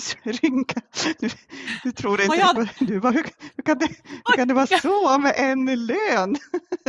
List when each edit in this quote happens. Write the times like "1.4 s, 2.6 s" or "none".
2.6 s